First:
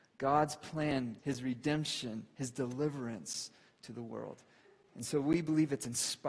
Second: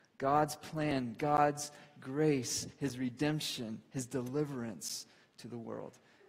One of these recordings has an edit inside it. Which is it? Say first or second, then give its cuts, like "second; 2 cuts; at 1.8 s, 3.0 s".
first; 1 cut; at 1.2 s